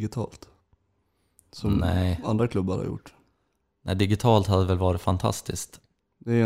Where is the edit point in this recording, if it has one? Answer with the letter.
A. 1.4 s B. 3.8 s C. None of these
C